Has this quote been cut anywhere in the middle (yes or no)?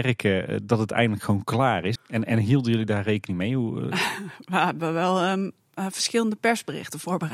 yes